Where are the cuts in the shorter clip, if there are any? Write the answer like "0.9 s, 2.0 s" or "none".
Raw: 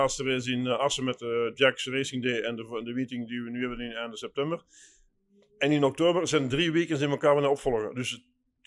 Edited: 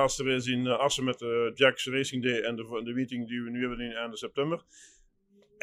none